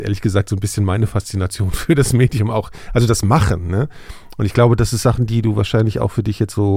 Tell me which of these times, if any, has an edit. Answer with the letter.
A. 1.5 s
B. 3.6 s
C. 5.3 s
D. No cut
D